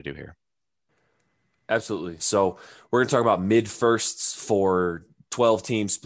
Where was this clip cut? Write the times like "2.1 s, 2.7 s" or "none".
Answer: 2.2 s